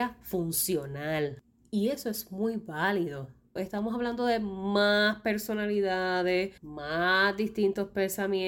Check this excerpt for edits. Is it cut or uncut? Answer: cut